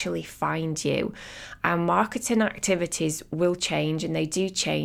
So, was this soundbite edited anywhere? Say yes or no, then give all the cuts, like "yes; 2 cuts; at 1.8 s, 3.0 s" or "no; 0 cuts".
no; 0 cuts